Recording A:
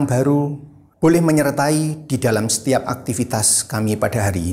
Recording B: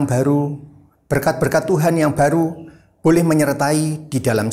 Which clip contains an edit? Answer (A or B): A